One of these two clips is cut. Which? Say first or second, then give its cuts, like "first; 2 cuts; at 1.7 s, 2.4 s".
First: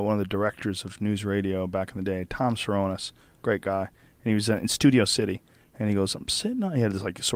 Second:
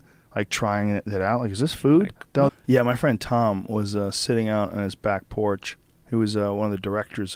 second; 1 cut; at 2.5 s